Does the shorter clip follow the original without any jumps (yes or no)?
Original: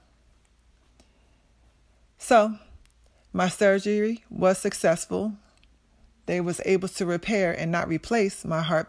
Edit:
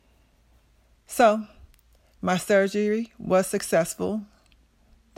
yes